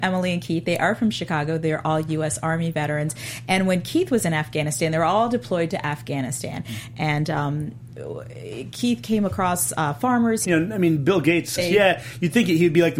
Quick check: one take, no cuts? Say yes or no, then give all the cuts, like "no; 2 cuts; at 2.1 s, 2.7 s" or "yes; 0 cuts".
no; 2 cuts; at 10.4 s, 11.6 s